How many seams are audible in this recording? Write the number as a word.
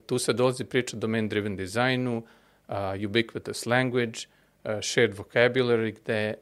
zero